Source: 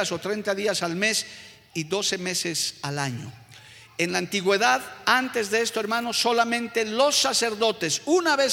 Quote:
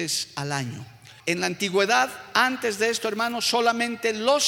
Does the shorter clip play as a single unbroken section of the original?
no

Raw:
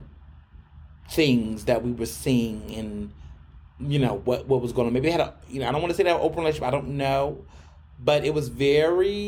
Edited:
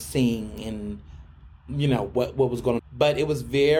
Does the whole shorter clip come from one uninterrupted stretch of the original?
no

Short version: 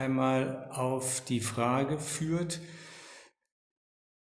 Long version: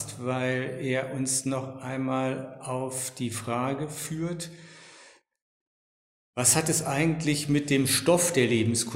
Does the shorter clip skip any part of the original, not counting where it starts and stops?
no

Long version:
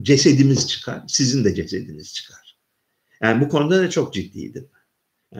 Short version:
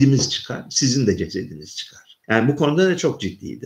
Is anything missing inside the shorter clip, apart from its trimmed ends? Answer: yes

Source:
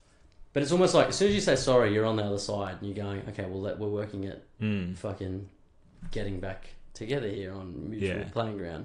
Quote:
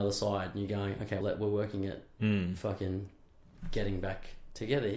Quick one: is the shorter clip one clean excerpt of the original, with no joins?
no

